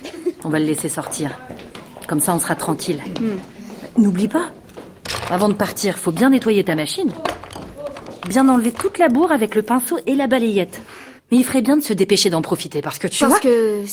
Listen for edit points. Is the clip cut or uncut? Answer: cut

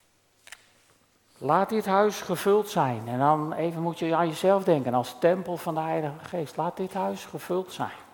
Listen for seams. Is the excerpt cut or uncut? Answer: uncut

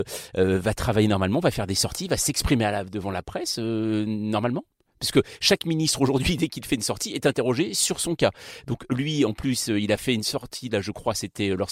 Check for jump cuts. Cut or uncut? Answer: uncut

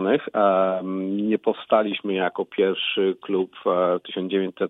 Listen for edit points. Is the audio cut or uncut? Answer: uncut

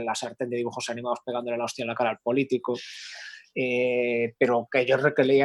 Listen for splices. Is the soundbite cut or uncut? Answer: uncut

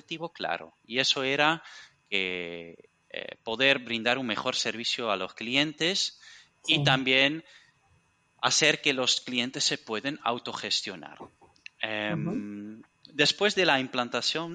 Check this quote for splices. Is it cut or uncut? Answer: uncut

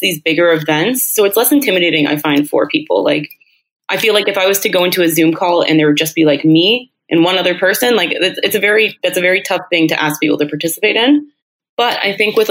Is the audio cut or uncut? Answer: uncut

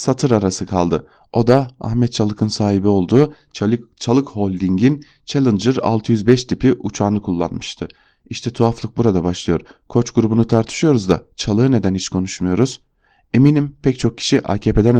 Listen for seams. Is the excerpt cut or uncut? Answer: uncut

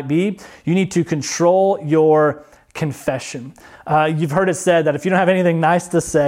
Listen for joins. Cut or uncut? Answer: uncut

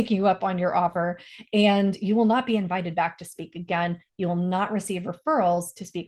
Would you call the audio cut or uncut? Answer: uncut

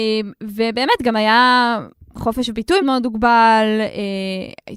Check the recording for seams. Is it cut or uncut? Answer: cut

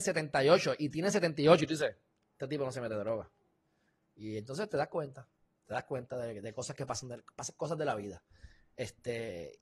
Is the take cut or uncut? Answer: uncut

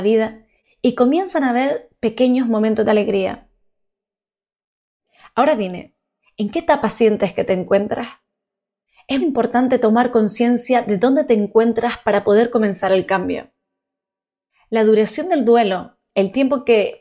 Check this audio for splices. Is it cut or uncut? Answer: cut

